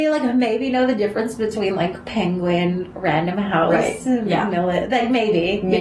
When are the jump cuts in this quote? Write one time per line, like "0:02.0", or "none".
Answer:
none